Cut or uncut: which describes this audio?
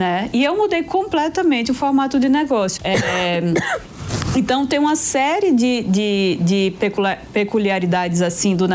cut